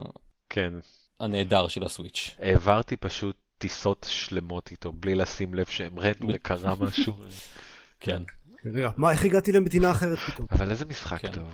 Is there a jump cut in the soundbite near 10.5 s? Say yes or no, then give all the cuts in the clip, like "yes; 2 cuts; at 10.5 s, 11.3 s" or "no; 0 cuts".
yes; 2 cuts; at 6.3 s, 10.5 s